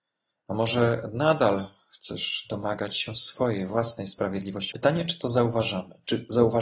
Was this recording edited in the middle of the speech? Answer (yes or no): yes